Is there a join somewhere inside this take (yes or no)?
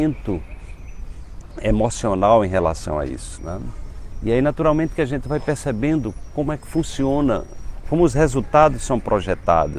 yes